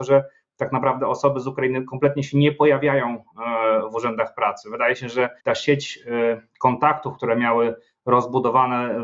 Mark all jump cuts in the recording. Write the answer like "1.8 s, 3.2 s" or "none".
5.4 s